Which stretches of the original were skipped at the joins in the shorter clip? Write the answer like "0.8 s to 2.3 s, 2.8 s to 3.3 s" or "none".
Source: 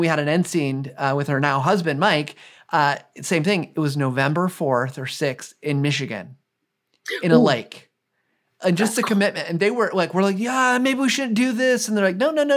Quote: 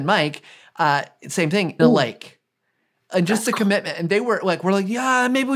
3.7 s to 7.3 s